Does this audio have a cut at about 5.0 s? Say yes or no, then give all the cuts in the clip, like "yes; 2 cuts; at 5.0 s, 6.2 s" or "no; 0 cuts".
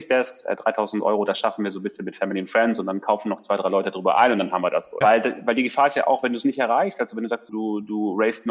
yes; 2 cuts; at 5.0 s, 7.5 s